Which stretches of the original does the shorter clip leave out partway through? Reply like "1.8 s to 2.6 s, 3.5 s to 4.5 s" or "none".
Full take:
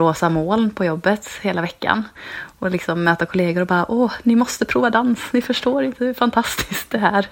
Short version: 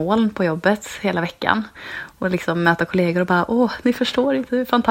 4.2 s to 5.3 s